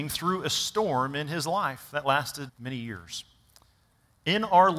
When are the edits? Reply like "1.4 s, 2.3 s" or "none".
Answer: 2.5 s